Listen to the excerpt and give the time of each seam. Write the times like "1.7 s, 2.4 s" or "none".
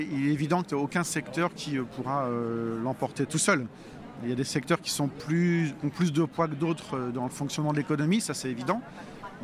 none